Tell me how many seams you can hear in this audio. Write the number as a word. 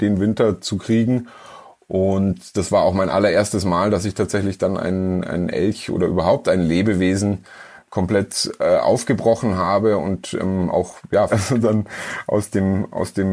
one